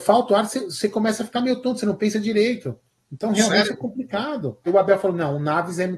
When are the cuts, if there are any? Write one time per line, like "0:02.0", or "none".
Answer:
0:04.7